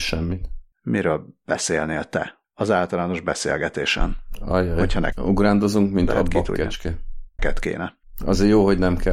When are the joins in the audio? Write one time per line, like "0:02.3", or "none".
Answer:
0:05.1
0:07.4